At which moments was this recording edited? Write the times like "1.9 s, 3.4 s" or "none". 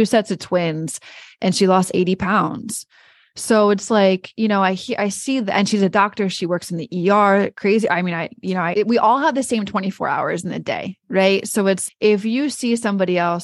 7.5 s, 8.7 s, 11.9 s